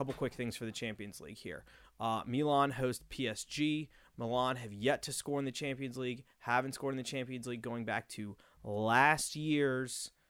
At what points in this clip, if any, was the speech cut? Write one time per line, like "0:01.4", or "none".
none